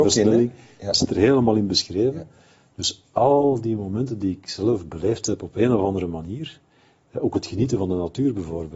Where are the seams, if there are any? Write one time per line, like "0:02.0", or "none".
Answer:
none